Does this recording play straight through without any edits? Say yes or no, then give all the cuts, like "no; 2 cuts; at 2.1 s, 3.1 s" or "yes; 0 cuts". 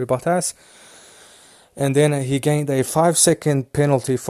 yes; 0 cuts